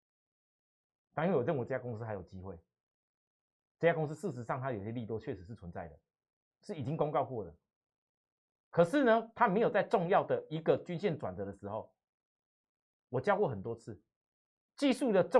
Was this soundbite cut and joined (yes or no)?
no